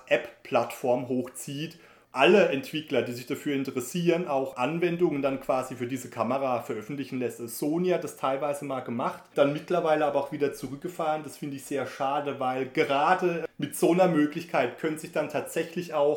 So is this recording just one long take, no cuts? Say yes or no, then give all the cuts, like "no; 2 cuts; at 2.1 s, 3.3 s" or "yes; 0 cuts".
yes; 0 cuts